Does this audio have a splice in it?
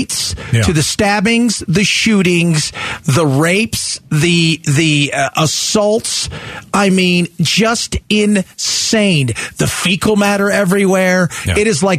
no; 0 cuts

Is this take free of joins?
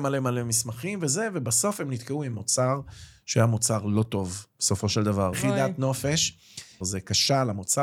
no; 2 cuts; at 5.3 s, 6.8 s

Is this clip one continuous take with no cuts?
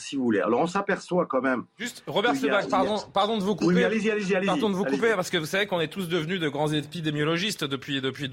yes; 0 cuts

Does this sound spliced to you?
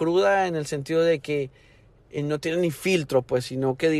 no; 0 cuts

